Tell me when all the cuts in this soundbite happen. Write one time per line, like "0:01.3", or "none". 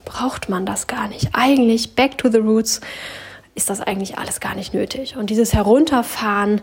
none

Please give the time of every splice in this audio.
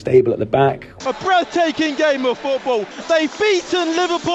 0:01.0
0:03.0

